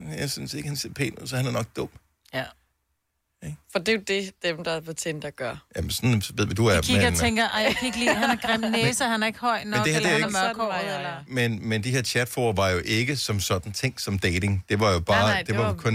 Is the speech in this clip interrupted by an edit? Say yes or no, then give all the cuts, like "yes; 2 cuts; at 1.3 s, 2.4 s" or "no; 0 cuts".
no; 0 cuts